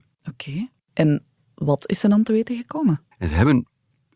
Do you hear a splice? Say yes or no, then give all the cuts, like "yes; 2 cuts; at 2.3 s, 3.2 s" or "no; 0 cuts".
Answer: yes; 1 cut; at 3.1 s